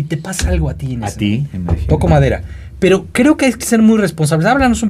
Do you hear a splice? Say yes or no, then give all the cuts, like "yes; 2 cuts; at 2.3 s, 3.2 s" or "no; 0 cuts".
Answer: no; 0 cuts